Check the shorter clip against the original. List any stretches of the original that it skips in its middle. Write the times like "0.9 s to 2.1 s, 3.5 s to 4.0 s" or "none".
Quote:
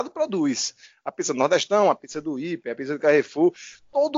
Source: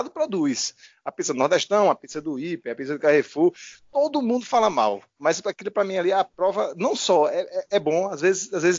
none